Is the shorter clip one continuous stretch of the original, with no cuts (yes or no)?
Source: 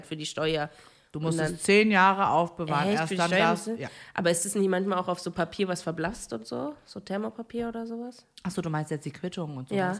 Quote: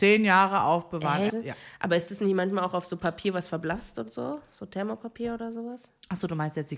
no